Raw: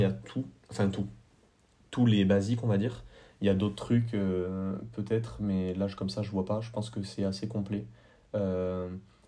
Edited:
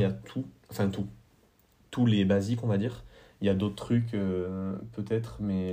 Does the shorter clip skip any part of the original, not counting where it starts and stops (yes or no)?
no